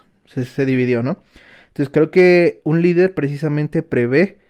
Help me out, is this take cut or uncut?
uncut